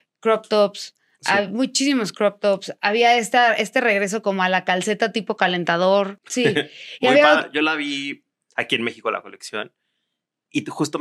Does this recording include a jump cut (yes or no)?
yes